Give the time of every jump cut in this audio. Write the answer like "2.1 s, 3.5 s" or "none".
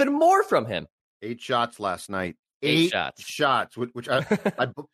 none